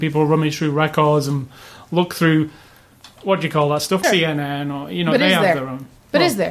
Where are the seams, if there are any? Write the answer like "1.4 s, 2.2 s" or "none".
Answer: 4.0 s